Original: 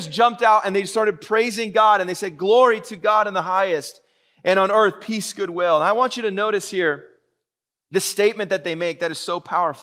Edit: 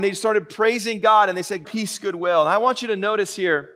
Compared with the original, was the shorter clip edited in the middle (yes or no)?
yes